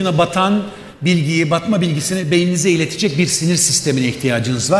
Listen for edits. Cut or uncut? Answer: uncut